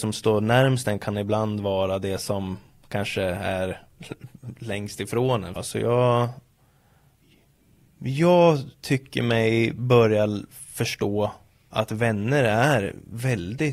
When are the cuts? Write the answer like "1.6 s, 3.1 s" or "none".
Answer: 5.6 s